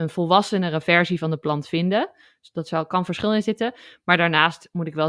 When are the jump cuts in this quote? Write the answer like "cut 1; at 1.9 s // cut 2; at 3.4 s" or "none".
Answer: none